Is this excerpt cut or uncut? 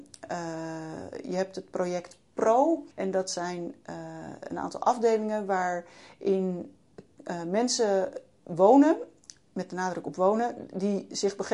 cut